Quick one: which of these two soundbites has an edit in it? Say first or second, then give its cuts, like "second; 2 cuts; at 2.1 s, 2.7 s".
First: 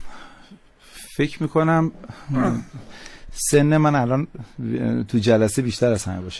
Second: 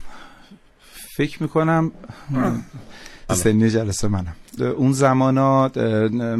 second; 2 cuts; at 3.3 s, 4.6 s